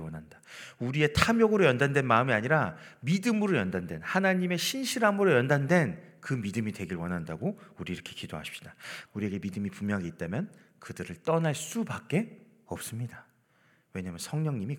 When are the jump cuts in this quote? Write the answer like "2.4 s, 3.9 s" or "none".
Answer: 9.0 s